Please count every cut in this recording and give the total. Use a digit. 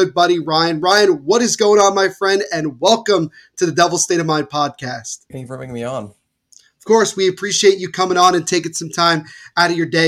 1